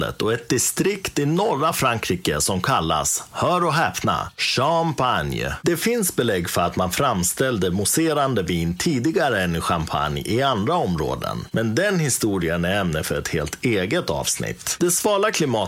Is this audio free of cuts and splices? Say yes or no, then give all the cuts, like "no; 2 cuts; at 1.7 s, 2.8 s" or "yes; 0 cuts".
no; 1 cut; at 14.8 s